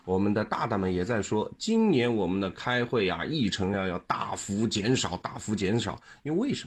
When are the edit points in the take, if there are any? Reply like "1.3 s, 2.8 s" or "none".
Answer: none

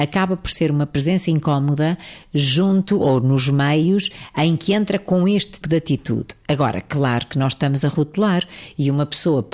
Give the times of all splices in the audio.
5.6 s

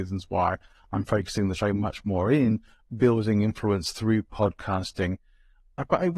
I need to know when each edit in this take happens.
none

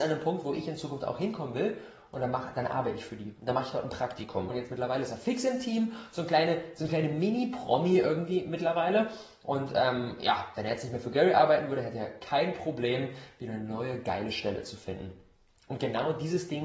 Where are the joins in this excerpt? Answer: 4.5 s

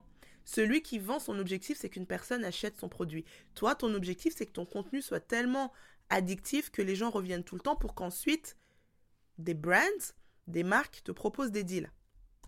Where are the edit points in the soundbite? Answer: none

